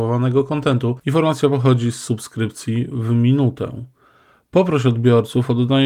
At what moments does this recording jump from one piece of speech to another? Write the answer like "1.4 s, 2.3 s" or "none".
1.0 s